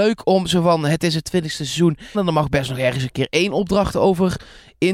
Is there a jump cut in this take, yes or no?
yes